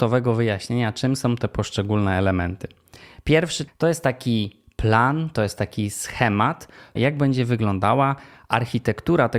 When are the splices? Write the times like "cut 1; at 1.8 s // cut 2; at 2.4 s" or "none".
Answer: cut 1; at 3.7 s // cut 2; at 7.0 s